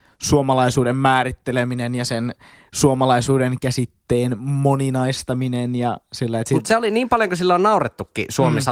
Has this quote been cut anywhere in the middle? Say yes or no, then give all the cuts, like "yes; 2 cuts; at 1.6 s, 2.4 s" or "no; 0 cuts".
no; 0 cuts